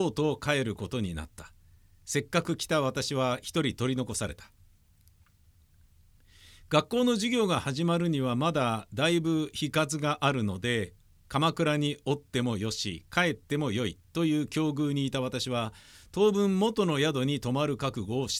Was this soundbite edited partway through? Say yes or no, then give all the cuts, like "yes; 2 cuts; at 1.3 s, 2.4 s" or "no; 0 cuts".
no; 0 cuts